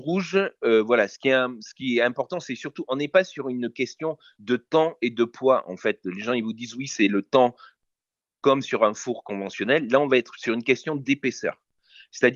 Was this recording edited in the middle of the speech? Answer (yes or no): no